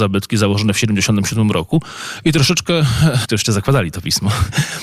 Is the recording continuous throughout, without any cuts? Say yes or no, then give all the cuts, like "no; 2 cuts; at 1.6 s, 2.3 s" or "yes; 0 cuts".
no; 1 cut; at 3.2 s